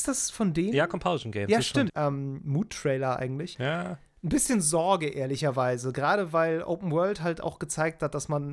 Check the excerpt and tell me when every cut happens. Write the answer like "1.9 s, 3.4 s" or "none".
1.9 s, 3.5 s